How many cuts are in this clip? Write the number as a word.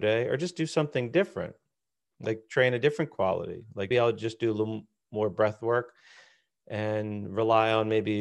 one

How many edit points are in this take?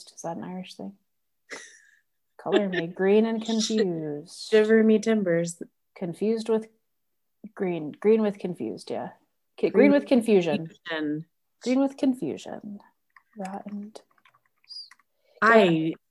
zero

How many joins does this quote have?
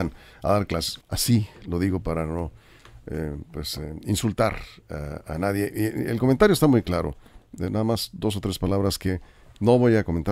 one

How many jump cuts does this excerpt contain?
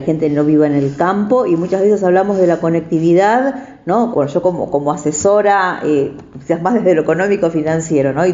one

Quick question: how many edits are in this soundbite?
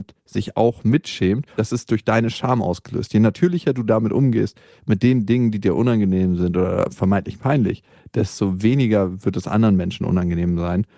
zero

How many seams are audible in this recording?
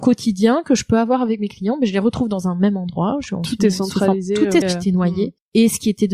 one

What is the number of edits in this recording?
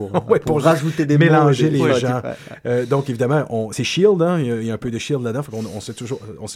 zero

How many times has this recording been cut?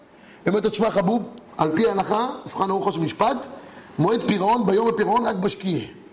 one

